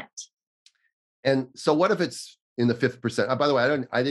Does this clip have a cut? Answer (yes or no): no